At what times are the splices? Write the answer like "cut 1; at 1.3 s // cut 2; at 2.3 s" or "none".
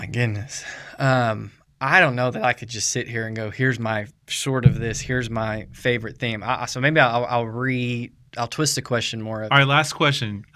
cut 1; at 9.5 s